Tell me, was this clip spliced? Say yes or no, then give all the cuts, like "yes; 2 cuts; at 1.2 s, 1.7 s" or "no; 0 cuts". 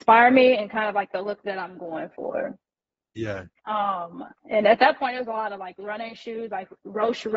no; 0 cuts